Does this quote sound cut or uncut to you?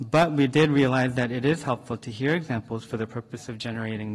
uncut